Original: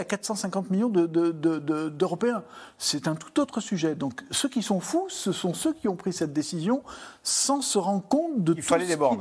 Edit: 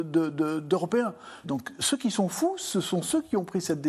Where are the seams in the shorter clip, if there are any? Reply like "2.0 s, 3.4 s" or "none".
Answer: 1.4 s